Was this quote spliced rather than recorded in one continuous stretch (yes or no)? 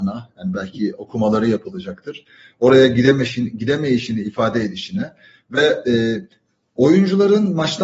no